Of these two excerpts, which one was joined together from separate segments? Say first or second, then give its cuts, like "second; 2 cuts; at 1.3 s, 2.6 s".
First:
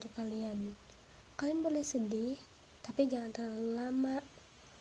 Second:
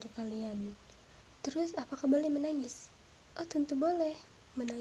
second; 1 cut; at 1.4 s